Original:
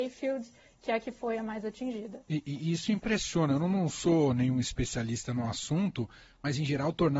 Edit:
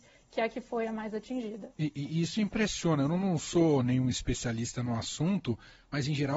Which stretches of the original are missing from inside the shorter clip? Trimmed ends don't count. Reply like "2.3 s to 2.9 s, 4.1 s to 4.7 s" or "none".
none